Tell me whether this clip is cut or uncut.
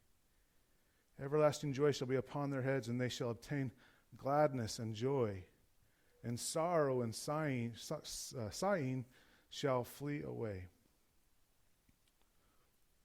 uncut